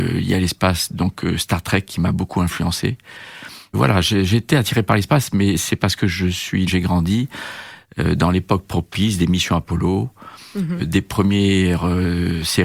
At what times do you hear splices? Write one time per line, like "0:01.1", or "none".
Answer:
0:03.7
0:06.7